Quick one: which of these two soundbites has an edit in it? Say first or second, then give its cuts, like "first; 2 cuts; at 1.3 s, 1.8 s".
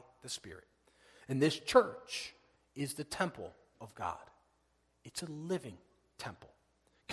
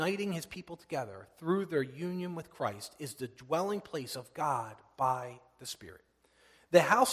first; 1 cut; at 1.1 s